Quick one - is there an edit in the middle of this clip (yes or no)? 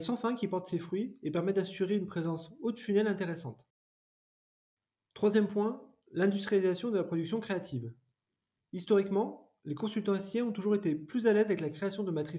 no